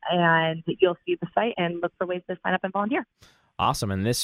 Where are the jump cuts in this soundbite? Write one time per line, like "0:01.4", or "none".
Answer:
0:01.5